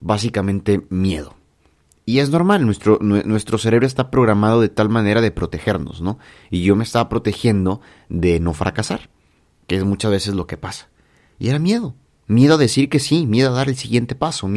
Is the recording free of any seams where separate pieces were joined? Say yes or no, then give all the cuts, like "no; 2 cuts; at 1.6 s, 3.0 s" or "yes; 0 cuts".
yes; 0 cuts